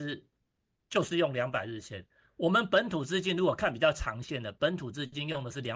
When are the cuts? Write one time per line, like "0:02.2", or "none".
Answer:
none

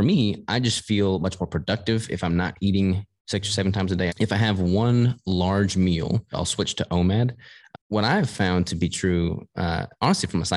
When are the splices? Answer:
0:04.1
0:06.3
0:07.7

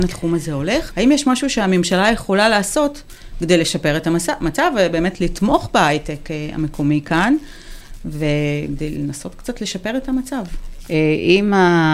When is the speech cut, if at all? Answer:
0:00.9
0:10.9

